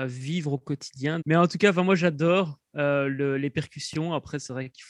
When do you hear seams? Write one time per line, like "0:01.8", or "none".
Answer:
0:01.2